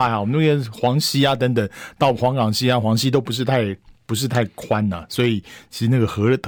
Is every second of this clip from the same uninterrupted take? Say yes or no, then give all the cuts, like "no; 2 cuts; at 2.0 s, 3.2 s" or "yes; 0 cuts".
yes; 0 cuts